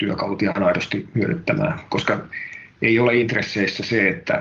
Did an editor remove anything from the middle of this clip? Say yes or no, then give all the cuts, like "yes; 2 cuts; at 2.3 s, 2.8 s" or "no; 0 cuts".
no; 0 cuts